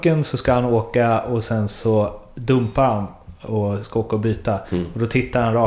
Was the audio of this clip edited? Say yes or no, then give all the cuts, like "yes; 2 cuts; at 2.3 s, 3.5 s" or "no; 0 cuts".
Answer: no; 0 cuts